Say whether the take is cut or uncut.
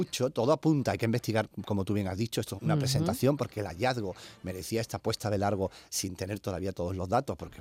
cut